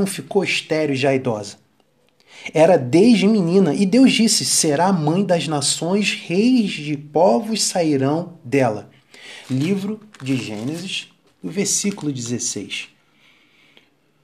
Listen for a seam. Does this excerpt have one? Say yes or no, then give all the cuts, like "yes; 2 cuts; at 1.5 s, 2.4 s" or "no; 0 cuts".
yes; 2 cuts; at 9.4 s, 11.3 s